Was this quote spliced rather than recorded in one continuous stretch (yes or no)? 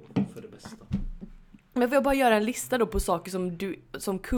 no